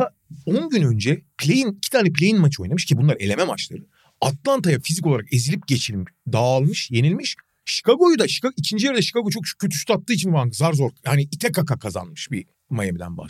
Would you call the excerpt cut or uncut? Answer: uncut